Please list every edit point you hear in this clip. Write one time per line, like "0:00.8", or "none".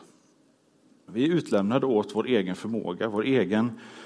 0:01.1